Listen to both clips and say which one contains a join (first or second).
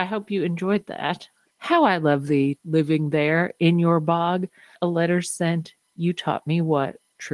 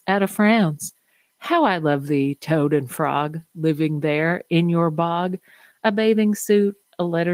first